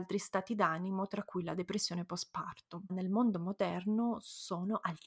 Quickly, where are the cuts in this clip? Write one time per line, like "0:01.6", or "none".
0:02.9